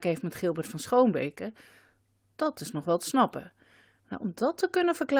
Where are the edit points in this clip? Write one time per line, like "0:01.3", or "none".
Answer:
0:04.0